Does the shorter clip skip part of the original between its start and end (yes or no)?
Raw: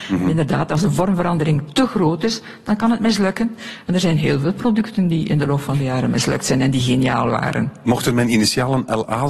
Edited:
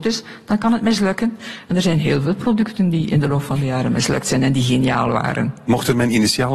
no